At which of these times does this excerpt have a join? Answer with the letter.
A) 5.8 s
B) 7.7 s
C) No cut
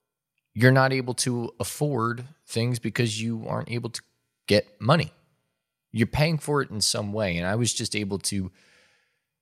C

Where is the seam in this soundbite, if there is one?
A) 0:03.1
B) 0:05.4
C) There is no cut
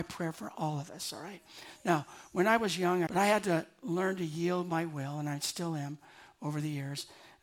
A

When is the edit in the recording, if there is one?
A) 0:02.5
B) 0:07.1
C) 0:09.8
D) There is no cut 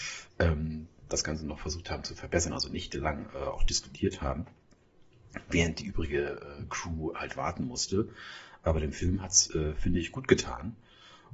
D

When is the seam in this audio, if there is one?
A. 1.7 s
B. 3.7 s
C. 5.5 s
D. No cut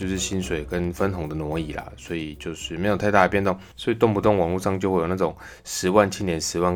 B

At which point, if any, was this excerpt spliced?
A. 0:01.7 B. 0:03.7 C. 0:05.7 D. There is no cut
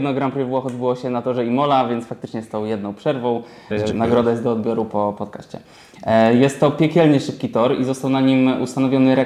B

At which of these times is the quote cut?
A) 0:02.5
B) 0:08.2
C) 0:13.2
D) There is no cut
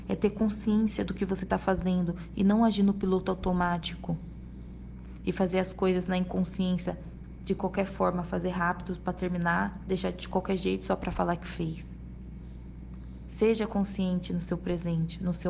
D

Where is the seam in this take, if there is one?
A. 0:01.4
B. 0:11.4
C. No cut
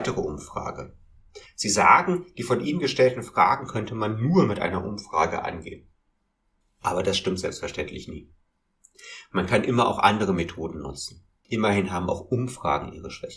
A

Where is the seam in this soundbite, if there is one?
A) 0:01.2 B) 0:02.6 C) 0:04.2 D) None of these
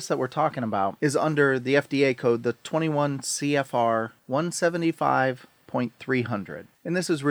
C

